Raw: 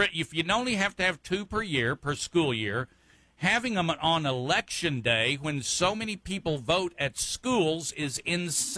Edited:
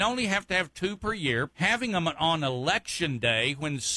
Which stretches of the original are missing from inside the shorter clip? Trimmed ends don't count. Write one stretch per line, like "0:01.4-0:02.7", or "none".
0:02.0-0:03.3